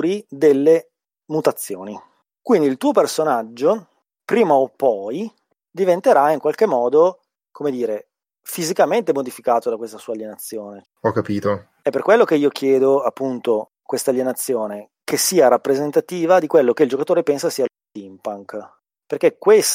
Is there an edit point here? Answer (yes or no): yes